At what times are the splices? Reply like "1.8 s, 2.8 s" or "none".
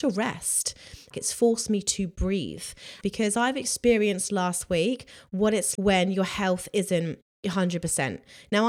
1.1 s, 3.0 s, 5.8 s